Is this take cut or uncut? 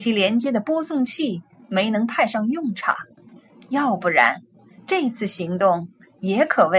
cut